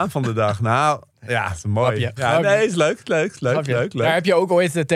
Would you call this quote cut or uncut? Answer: uncut